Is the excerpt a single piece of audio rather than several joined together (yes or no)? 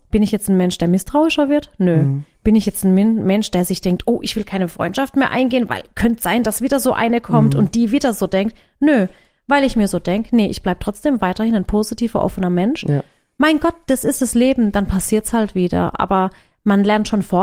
yes